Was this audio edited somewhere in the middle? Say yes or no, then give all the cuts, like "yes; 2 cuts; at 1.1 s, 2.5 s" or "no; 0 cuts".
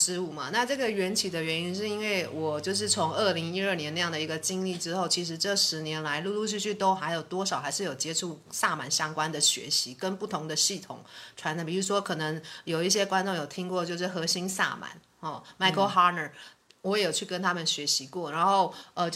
no; 0 cuts